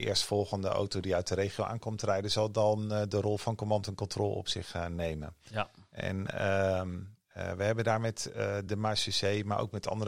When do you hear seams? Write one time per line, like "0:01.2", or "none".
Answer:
none

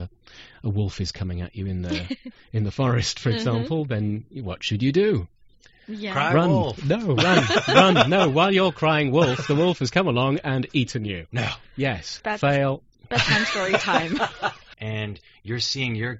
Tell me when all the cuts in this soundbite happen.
0:12.2
0:14.7

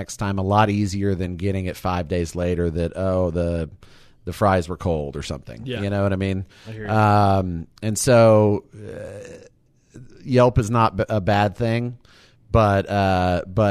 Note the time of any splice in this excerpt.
none

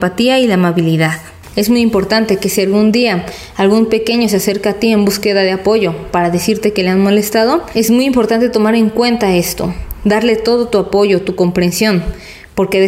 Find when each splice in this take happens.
none

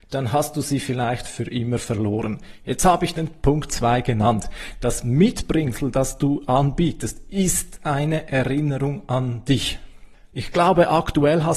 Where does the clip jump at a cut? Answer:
0:10.3

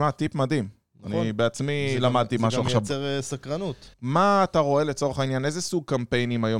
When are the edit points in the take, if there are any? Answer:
0:03.9

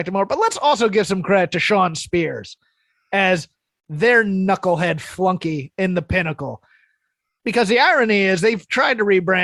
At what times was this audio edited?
none

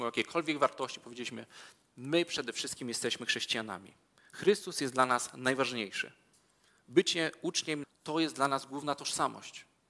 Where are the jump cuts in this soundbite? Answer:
0:07.8

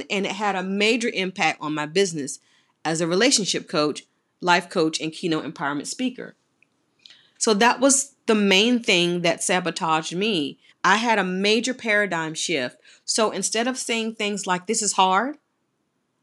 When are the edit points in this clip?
0:07.4
0:10.7

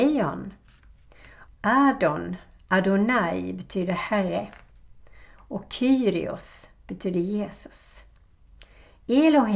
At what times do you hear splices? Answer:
0:01.5

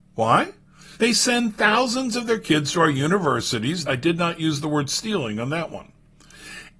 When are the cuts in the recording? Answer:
0:00.9
0:03.8

